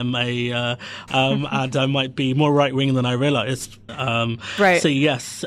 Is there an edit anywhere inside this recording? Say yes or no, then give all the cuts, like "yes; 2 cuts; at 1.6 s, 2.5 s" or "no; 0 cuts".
yes; 2 cuts; at 1.1 s, 3.9 s